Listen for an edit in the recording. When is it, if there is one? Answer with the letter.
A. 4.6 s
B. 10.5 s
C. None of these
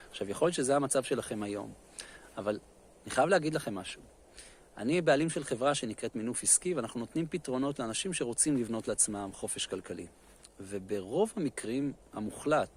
C